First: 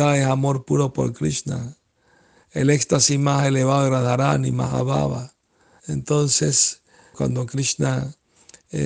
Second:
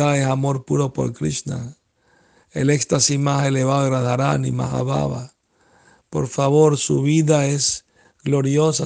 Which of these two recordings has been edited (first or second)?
first